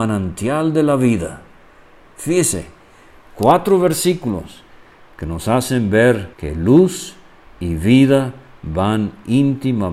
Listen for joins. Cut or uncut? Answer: cut